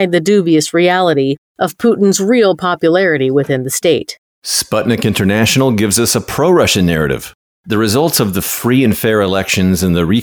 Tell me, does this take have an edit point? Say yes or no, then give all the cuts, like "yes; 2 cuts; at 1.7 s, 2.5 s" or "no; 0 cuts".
no; 0 cuts